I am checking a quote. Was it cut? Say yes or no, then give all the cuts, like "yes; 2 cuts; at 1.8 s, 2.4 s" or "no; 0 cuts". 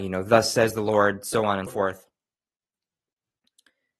yes; 1 cut; at 1.7 s